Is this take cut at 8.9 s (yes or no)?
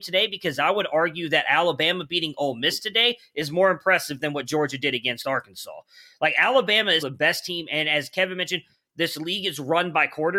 no